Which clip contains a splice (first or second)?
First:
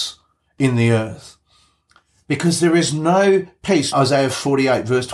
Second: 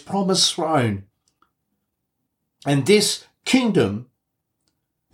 first